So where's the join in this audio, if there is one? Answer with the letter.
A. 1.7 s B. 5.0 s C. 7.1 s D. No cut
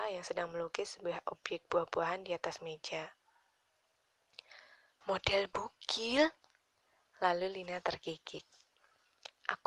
B